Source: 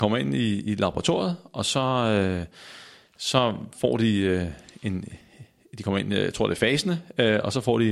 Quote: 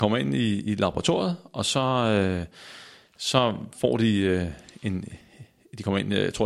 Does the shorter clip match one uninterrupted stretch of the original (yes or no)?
yes